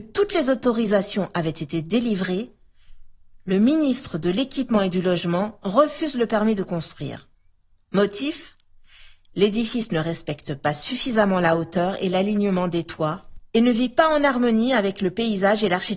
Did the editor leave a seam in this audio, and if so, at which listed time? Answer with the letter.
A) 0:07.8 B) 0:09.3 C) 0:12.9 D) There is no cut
D